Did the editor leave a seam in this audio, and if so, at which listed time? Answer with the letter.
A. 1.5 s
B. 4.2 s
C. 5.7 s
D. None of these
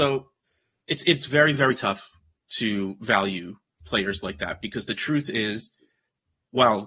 D